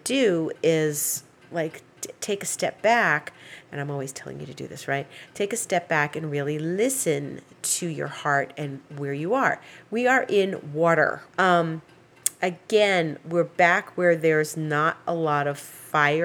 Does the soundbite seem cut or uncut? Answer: cut